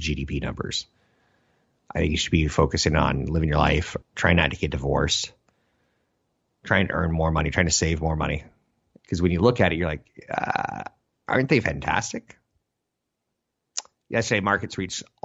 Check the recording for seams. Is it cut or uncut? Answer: cut